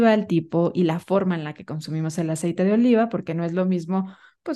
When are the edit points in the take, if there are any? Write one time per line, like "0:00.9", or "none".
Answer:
none